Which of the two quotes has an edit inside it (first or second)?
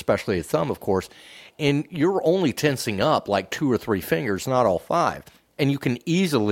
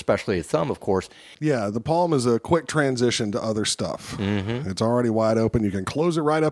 second